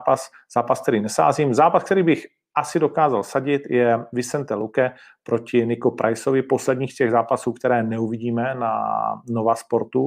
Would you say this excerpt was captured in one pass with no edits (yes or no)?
yes